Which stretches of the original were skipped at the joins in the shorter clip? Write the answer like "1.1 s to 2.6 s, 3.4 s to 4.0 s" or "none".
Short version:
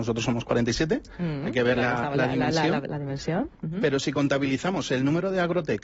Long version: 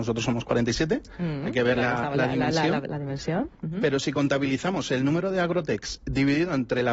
none